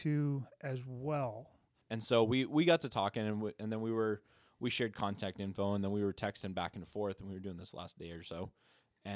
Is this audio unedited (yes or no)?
no